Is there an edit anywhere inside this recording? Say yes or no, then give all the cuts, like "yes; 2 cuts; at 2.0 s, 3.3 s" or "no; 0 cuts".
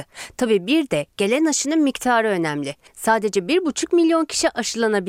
no; 0 cuts